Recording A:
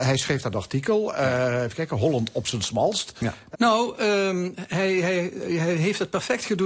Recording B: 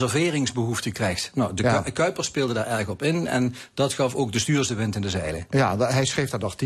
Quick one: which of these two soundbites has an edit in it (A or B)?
A